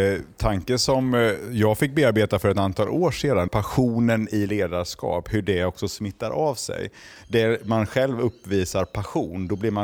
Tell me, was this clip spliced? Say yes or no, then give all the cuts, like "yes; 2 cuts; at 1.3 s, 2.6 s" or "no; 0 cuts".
yes; 2 cuts; at 3.5 s, 7.2 s